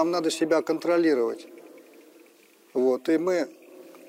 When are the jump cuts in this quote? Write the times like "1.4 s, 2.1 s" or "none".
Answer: none

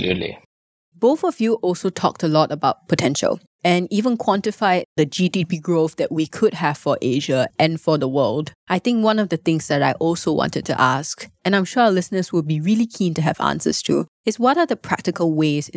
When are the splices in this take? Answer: none

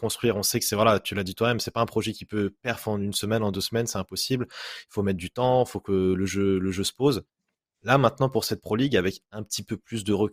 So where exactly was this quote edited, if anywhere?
none

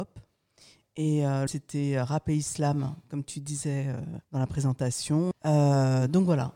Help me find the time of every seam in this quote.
1.5 s, 4.2 s, 5.3 s

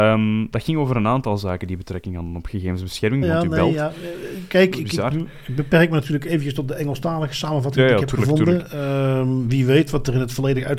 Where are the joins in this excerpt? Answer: 3.2 s

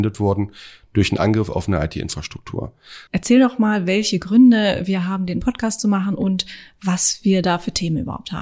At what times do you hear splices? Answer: 3.1 s

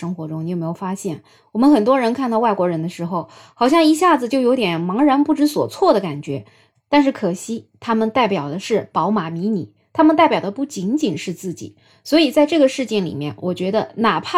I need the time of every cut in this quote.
6.7 s

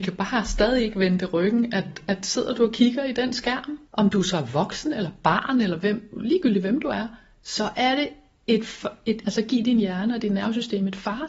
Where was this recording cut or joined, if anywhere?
3.9 s, 9.2 s

